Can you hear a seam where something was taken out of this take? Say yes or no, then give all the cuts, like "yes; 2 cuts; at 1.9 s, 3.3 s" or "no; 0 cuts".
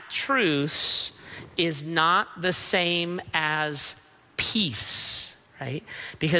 no; 0 cuts